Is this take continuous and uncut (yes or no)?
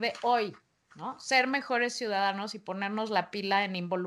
yes